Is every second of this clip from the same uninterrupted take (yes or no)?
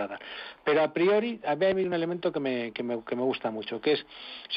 yes